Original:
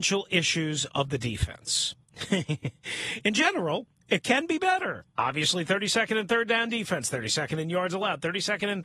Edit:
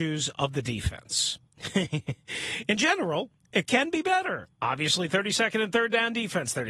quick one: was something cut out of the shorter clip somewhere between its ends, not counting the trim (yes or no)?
no